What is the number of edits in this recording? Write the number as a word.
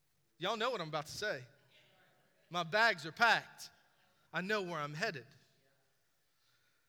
one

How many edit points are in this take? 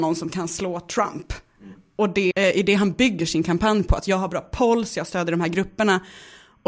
one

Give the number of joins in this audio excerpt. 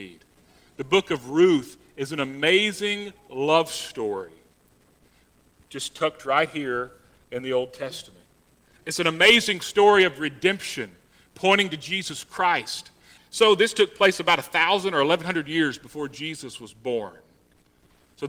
one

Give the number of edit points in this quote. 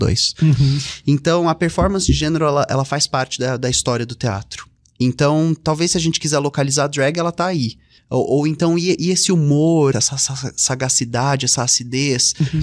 two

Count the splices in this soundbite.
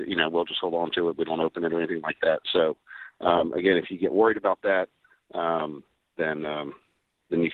zero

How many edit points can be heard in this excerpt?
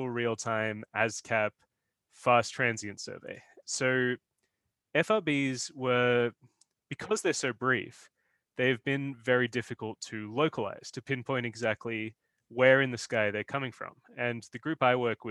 one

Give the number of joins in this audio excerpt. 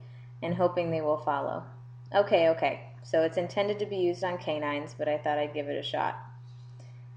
zero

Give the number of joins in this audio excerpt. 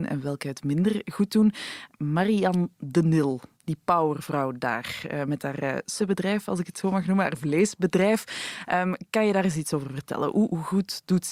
two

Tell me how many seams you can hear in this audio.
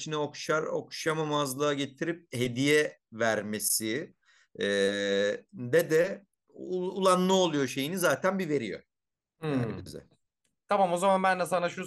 zero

